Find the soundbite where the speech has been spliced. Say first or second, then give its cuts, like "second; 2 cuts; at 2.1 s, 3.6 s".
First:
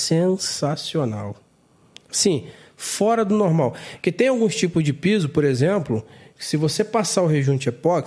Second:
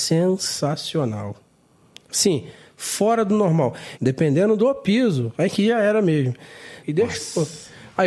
second; 2 cuts; at 3.9 s, 6.8 s